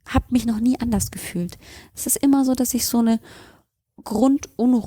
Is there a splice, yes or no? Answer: no